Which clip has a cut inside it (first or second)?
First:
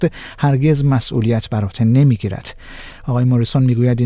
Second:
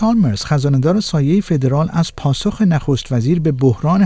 first